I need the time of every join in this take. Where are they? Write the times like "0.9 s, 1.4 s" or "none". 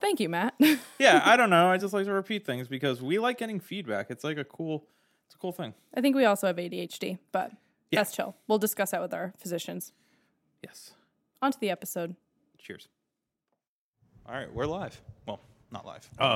none

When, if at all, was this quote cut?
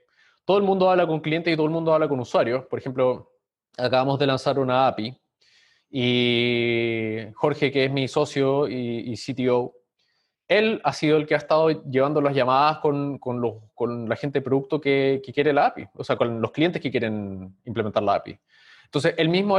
16.2 s

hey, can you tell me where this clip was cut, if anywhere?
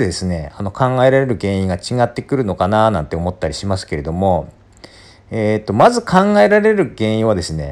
none

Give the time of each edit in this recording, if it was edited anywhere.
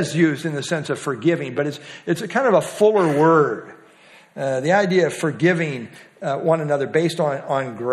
none

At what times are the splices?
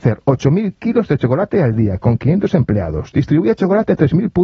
none

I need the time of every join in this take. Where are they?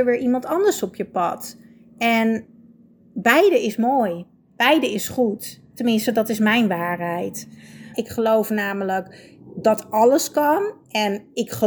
7.9 s

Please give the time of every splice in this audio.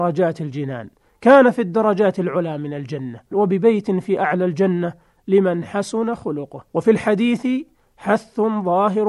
3.3 s, 6.7 s

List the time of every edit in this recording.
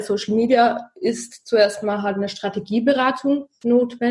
none

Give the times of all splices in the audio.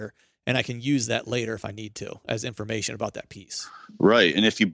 none

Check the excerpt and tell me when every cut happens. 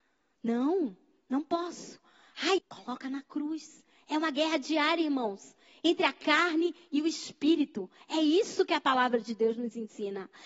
2.6 s

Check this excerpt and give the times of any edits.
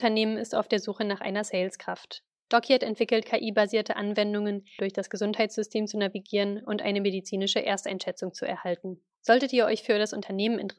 4.8 s, 9.2 s

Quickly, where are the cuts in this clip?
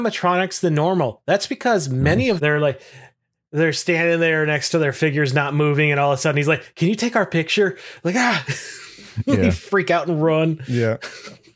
2.4 s

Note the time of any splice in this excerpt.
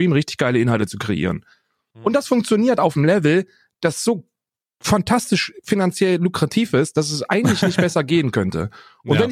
none

